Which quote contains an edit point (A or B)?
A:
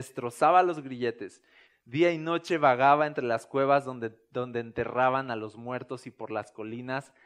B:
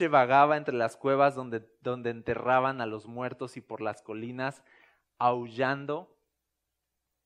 A